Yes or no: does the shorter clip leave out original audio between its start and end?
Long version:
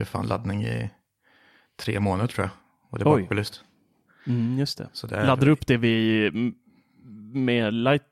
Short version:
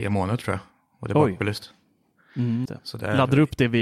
yes